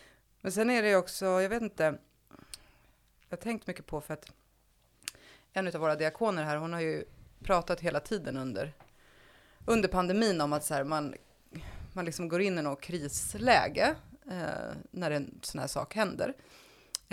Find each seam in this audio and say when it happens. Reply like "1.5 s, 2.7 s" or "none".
none